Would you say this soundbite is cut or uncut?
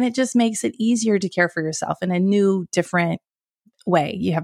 uncut